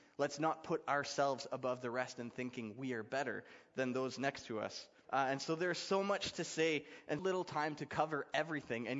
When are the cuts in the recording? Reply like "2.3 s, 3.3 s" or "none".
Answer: 5.0 s, 7.2 s